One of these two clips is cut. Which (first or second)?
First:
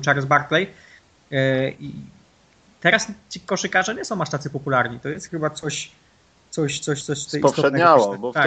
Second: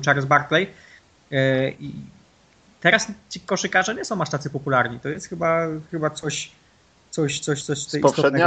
first